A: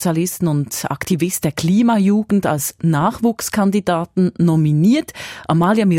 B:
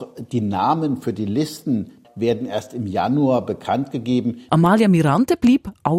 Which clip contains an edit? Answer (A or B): B